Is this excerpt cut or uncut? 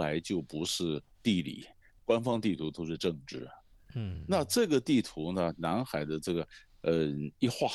uncut